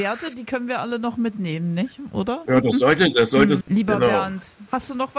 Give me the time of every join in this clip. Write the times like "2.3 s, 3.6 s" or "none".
2.5 s, 3.6 s